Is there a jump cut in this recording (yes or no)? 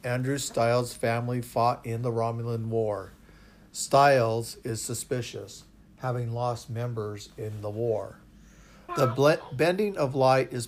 yes